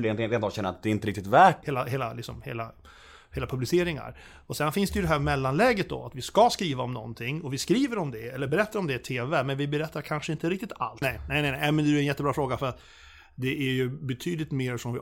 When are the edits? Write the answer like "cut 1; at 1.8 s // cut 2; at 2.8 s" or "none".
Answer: cut 1; at 1.6 s // cut 2; at 11.0 s

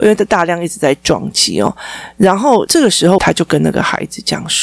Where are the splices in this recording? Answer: cut 1; at 3.2 s

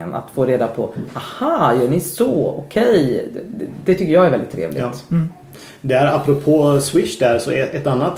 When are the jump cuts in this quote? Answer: none

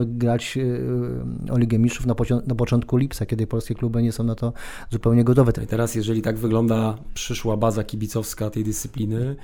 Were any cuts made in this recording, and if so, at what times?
cut 1; at 5.5 s // cut 2; at 8.5 s

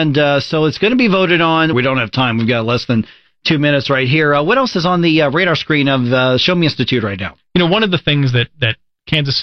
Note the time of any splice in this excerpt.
cut 1; at 1.7 s

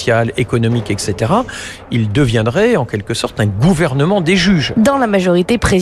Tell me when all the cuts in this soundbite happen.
none

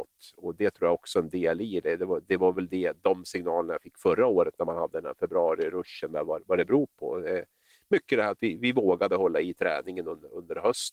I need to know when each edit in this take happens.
none

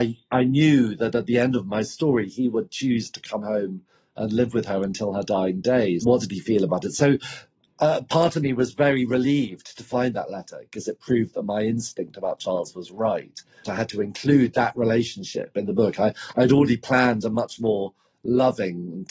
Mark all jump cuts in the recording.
cut 1; at 6.0 s // cut 2; at 13.6 s

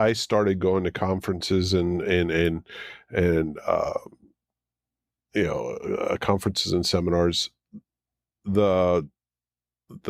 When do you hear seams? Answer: none

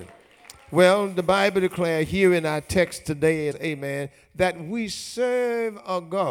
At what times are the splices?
cut 1; at 3.5 s

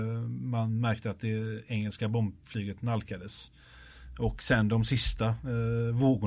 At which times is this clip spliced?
none

